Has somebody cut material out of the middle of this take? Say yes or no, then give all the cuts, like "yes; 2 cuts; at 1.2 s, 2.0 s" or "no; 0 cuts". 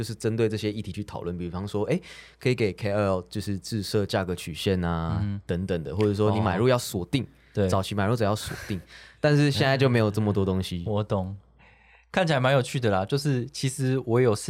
no; 0 cuts